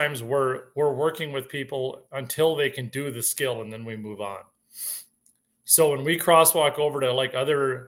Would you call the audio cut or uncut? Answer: uncut